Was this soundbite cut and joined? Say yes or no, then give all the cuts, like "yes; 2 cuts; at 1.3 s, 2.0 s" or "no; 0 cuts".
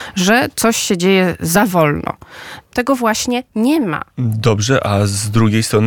yes; 1 cut; at 2.7 s